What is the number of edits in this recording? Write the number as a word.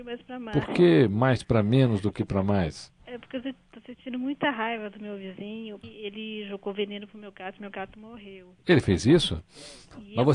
one